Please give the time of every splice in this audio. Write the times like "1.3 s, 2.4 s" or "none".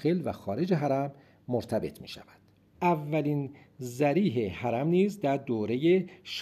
2.7 s

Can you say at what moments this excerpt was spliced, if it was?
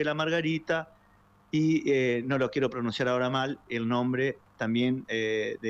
none

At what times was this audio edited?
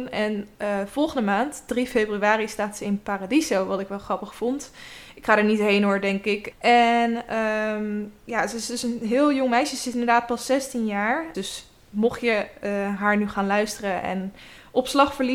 6.5 s, 11.3 s

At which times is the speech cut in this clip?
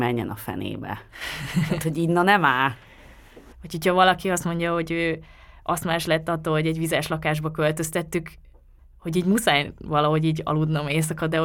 3.5 s

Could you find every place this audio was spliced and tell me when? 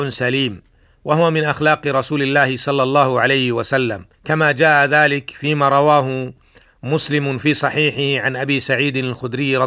4.1 s

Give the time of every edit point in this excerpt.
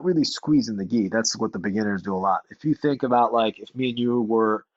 none

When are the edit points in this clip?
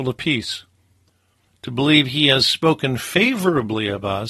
1.5 s

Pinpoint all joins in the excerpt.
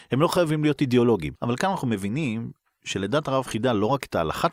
1.4 s

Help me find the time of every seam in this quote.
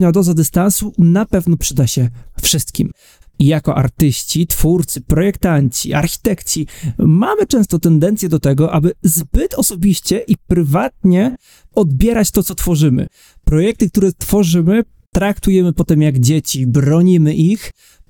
3.2 s

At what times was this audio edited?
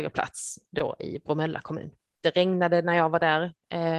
2.2 s

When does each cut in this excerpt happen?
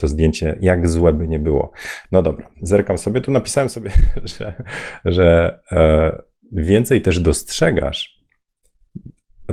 2.0 s

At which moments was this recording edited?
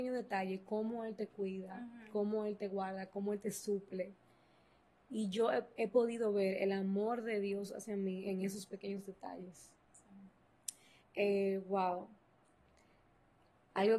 11.0 s

